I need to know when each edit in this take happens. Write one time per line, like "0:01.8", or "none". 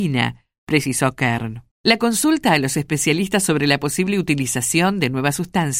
none